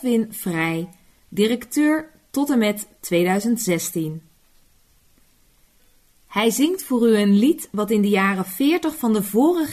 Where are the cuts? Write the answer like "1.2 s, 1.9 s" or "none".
none